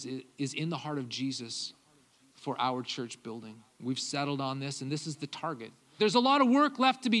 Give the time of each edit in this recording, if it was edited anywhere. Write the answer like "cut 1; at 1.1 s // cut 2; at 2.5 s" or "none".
cut 1; at 6.0 s